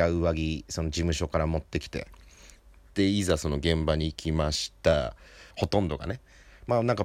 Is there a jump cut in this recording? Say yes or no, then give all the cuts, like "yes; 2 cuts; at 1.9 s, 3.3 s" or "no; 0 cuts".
yes; 1 cut; at 5.5 s